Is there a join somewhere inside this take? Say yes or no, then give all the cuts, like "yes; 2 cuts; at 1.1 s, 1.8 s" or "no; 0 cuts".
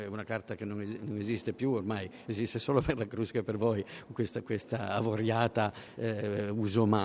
no; 0 cuts